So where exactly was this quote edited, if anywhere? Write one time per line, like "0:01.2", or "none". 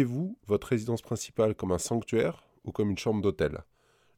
none